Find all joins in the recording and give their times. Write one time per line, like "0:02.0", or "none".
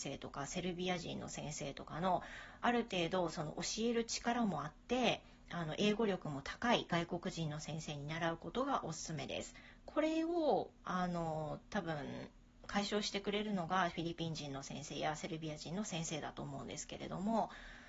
0:09.8